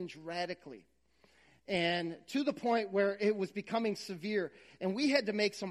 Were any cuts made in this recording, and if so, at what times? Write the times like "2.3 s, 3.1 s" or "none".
none